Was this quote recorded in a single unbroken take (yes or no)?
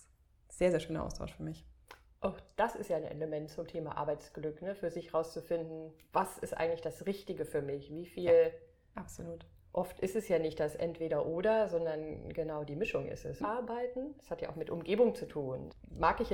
no